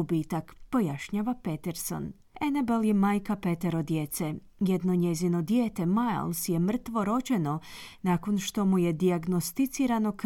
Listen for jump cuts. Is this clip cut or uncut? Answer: uncut